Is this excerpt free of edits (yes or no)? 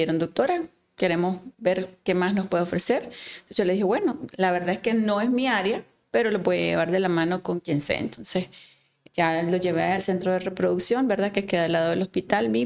no